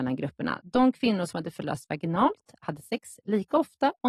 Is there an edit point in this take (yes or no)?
no